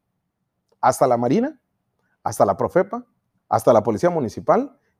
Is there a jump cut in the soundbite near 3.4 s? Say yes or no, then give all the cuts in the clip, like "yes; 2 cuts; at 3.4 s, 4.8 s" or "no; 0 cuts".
yes; 1 cut; at 3.4 s